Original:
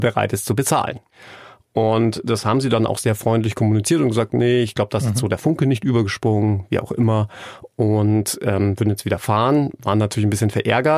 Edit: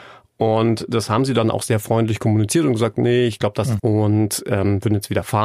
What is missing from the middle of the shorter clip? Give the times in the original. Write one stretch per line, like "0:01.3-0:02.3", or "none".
0:05.1-0:07.7